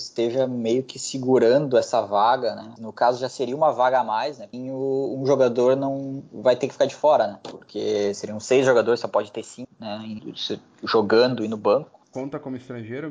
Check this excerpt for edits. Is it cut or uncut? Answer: cut